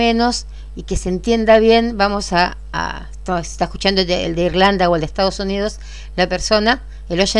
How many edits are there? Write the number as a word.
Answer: zero